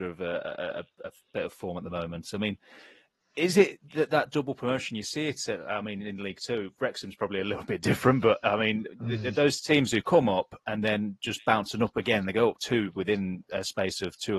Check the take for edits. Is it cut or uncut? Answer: uncut